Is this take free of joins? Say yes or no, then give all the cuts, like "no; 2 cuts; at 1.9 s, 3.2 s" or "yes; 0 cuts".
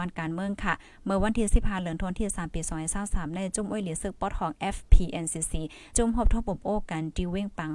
no; 1 cut; at 5.9 s